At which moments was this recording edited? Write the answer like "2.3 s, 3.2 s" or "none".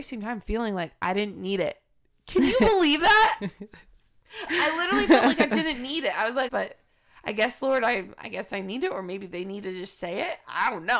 6.5 s